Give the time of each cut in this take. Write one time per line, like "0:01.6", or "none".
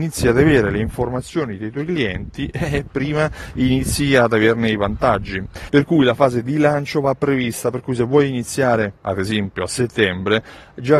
0:05.7